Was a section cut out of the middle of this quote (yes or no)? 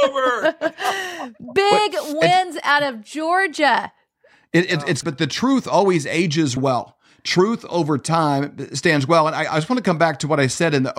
yes